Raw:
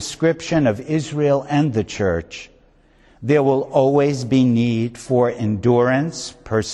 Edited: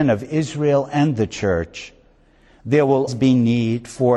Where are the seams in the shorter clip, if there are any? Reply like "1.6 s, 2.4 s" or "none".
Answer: 3.1 s